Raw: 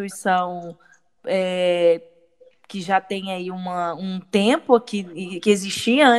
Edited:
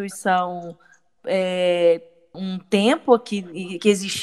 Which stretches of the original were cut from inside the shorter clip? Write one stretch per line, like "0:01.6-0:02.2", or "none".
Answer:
0:02.3-0:04.0

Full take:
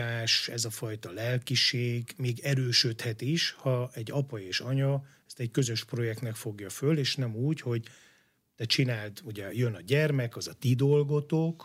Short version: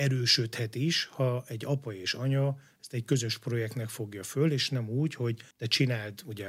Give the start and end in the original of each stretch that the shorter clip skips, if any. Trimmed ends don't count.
0:08.0-0:08.5

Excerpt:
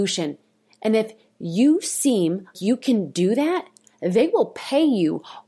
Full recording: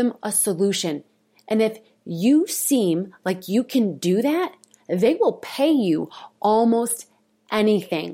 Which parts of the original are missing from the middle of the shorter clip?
0:03.2-0:03.4

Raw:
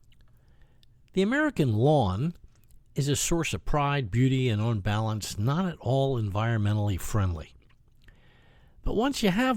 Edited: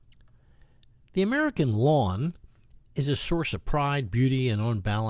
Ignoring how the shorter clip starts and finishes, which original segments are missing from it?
none

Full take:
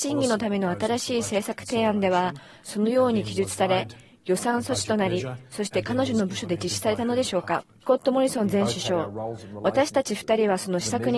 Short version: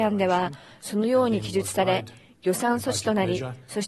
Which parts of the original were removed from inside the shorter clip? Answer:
none

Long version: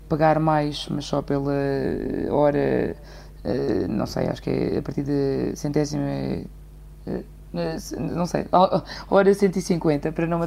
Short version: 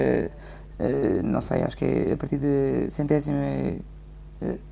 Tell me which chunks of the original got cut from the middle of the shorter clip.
none

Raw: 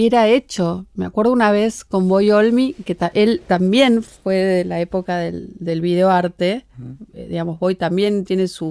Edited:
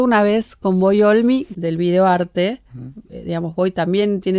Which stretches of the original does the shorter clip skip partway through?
0:02.8-0:05.6

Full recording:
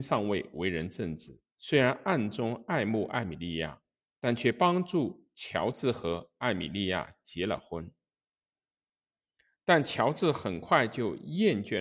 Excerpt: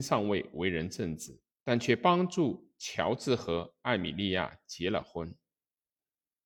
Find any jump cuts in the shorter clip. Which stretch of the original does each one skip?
0:01.5-0:04.1

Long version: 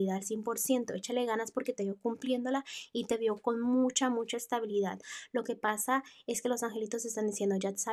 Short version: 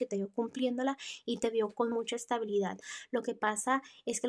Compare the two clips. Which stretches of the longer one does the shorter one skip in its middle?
0:03.6-0:04.1

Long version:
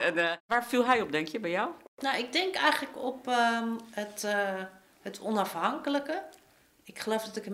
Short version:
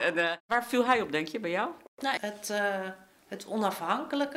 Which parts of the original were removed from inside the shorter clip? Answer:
0:02.2-0:03.9

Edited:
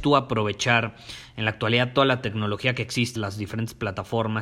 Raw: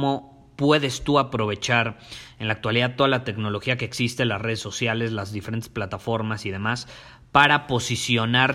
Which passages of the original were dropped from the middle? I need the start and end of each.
0:04.2-0:05.1

